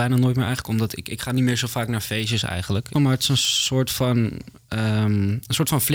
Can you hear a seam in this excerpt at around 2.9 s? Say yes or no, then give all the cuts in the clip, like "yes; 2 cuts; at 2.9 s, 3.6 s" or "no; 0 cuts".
yes; 1 cut; at 2.9 s